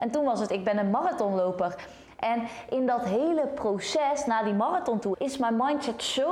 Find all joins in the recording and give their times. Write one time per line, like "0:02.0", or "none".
0:05.1